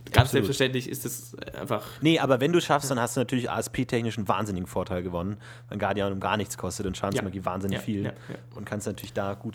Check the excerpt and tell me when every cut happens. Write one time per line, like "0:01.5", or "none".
none